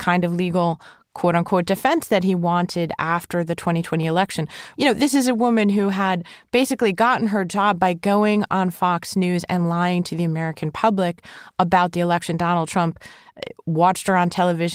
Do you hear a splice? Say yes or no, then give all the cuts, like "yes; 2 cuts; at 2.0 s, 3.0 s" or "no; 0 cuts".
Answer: yes; 1 cut; at 4.7 s